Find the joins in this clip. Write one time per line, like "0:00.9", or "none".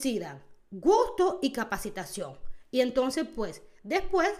none